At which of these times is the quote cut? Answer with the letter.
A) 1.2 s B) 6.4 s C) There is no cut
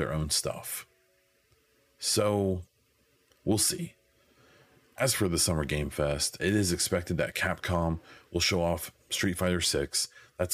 B